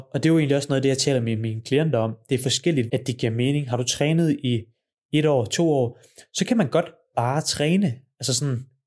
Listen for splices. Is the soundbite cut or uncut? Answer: cut